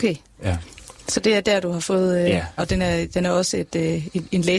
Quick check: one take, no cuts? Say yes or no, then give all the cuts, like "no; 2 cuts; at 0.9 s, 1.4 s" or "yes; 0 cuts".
no; 1 cut; at 2.6 s